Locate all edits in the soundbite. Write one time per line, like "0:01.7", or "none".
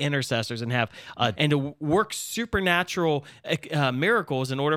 0:01.4